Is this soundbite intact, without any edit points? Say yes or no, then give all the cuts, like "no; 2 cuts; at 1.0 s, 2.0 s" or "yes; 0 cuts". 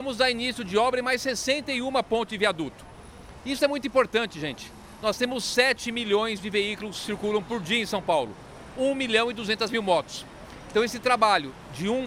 yes; 0 cuts